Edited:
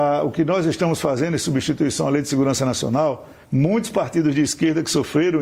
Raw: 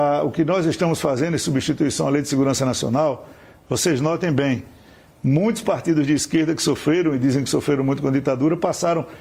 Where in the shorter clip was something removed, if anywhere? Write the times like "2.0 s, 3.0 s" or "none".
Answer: 3.4 s